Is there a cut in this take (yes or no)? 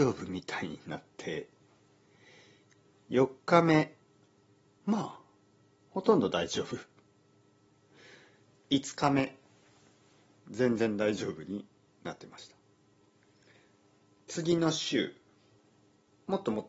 no